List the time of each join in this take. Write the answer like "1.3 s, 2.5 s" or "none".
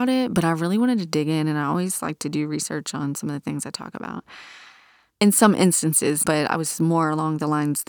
5.1 s, 6.2 s